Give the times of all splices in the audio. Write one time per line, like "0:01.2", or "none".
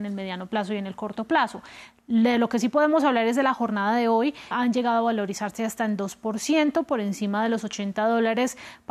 0:04.5